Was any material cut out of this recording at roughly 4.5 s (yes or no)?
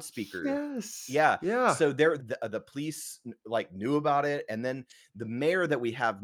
no